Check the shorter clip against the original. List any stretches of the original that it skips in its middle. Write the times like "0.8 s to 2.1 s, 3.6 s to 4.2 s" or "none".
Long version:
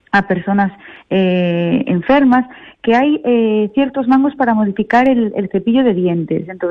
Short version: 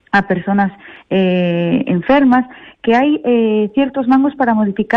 none